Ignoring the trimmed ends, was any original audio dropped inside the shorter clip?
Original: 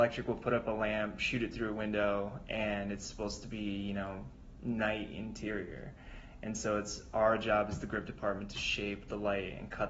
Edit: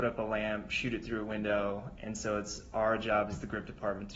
yes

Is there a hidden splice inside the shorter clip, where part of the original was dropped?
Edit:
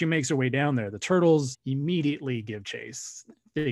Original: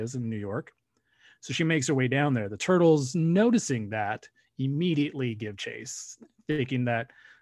yes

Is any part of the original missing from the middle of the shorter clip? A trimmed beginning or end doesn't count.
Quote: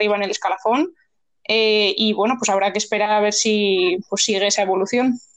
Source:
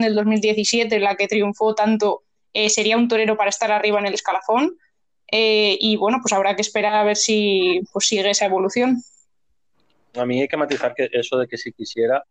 no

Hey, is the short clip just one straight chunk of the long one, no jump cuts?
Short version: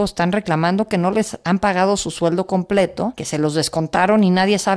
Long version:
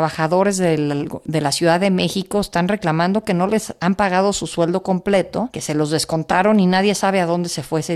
yes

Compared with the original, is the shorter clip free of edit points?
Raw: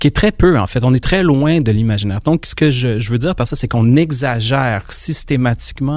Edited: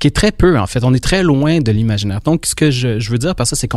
yes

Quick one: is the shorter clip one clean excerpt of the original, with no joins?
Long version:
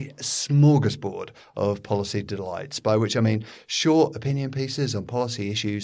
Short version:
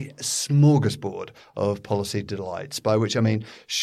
yes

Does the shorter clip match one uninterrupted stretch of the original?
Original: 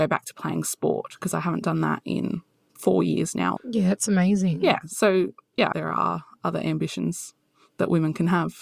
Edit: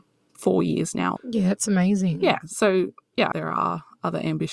yes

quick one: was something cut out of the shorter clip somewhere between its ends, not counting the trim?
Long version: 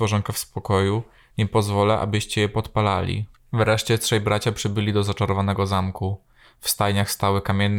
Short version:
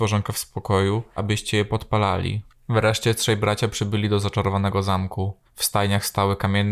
yes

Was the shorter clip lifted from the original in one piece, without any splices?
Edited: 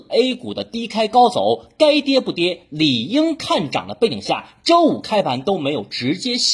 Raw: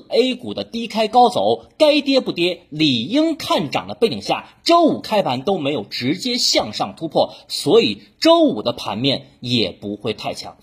yes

